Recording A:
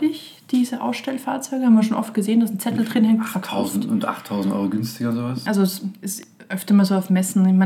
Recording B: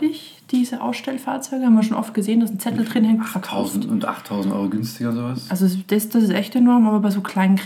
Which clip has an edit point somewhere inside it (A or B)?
A